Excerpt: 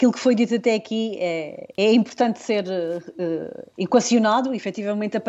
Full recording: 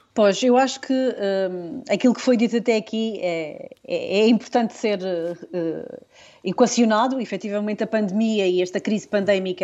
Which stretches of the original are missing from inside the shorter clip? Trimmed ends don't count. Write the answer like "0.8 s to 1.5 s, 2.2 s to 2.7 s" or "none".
3.8 s to 4.1 s, 6.1 s to 6.4 s